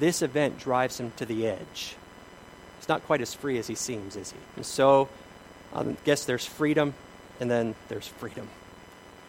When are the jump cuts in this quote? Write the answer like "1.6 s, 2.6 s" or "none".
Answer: 4.5 s